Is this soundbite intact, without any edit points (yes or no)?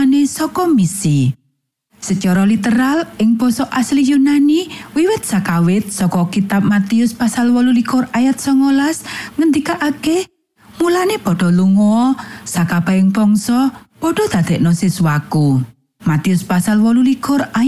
no